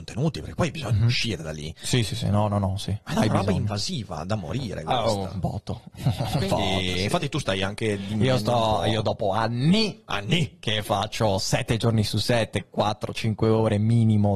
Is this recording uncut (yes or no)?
yes